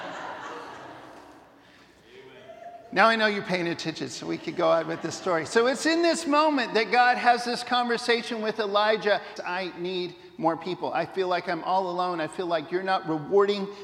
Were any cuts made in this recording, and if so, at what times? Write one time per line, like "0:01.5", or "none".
0:09.4